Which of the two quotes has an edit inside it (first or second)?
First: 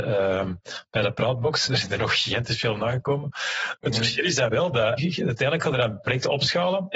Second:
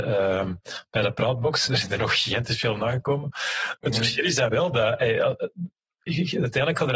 first